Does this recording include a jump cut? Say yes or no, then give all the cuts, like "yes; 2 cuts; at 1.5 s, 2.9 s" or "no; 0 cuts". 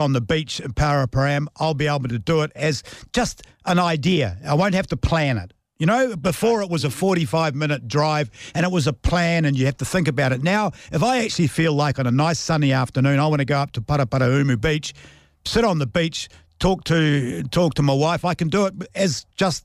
no; 0 cuts